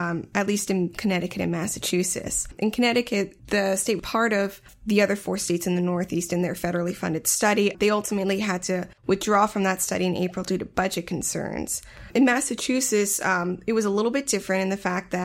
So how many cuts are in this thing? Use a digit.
1